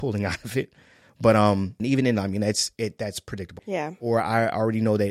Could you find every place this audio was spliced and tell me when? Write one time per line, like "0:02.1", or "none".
0:01.8
0:03.6